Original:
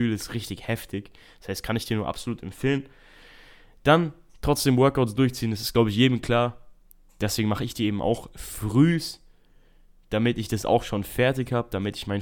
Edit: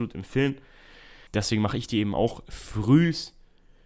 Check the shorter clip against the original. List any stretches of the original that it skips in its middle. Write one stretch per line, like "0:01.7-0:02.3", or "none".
0:03.5-0:07.1

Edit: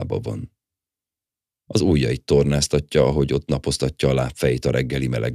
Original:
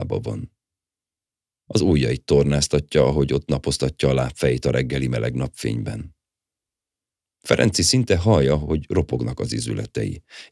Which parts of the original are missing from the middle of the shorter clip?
none

